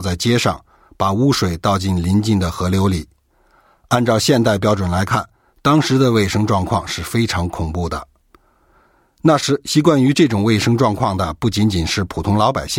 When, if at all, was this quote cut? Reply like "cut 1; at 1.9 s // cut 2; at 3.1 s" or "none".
none